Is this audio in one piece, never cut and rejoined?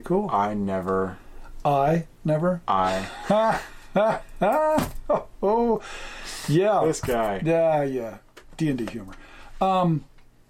yes; 0 cuts

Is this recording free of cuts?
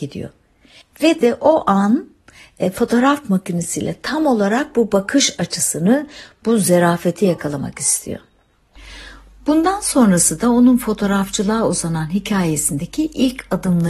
yes; 0 cuts

